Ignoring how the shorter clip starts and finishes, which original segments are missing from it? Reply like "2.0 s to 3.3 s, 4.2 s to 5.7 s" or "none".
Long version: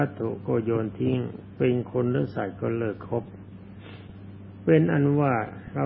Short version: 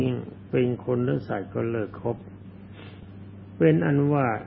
none